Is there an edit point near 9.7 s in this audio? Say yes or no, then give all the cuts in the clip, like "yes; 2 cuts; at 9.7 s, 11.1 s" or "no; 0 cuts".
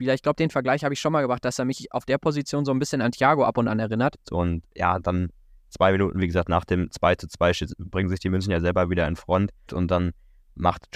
yes; 2 cuts; at 4.2 s, 9.7 s